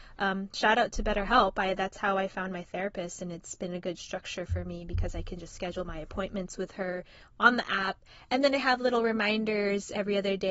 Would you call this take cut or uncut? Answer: uncut